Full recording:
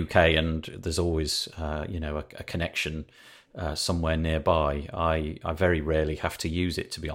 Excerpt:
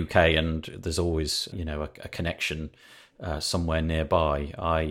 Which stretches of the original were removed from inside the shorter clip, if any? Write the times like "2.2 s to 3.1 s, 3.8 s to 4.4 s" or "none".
1.5 s to 1.9 s